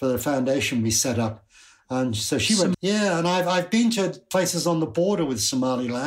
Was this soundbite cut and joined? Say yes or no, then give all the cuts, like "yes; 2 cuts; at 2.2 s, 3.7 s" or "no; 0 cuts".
yes; 1 cut; at 2.7 s